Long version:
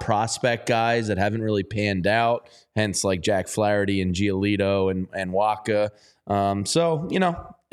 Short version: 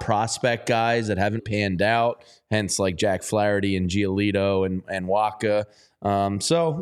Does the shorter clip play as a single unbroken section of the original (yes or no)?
no